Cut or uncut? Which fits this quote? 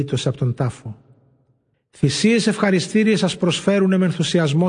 cut